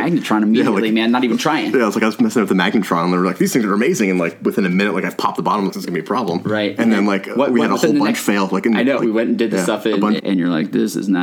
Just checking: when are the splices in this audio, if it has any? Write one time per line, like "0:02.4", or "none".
0:05.7
0:09.0
0:10.2